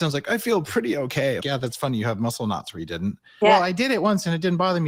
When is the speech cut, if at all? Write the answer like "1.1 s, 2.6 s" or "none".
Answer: 1.4 s, 3.4 s